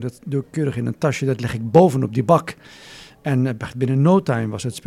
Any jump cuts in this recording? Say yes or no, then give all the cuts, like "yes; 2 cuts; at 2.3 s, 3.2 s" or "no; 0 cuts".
no; 0 cuts